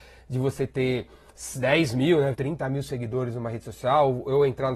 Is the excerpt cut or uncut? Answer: cut